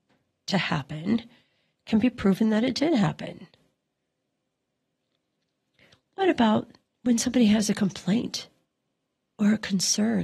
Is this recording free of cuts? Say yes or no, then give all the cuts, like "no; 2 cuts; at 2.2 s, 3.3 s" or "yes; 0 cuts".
yes; 0 cuts